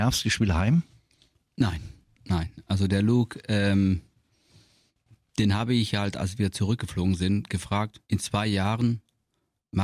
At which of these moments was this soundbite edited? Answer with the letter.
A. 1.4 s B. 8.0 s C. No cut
B